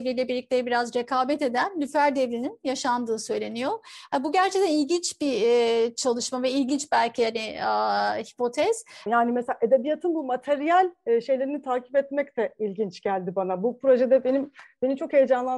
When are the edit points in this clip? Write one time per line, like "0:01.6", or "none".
0:09.1